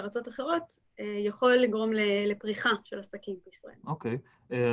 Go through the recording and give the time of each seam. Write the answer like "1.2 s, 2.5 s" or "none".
3.8 s